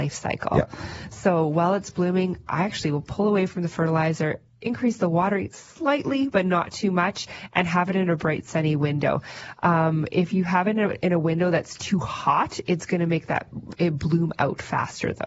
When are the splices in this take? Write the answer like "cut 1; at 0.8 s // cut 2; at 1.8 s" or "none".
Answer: none

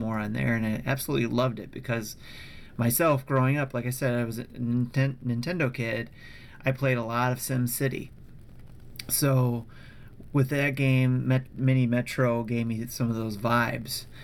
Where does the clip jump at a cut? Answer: none

